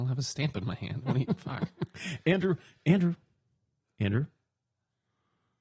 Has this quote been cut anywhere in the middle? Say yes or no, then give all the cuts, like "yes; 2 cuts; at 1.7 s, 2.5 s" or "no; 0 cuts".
no; 0 cuts